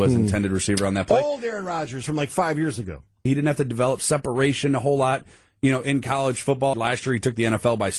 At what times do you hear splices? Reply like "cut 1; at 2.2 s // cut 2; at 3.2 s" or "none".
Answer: cut 1; at 3.3 s // cut 2; at 6.7 s